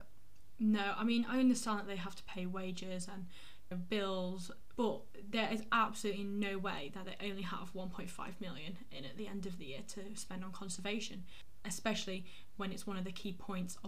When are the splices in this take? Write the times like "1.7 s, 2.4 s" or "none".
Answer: 3.7 s, 4.7 s